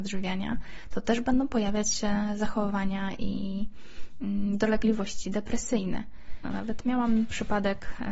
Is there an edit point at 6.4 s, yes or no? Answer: yes